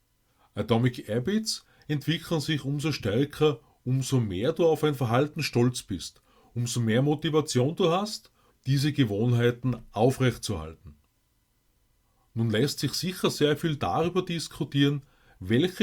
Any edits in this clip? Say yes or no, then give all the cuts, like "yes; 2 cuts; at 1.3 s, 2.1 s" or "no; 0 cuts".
yes; 1 cut; at 8.5 s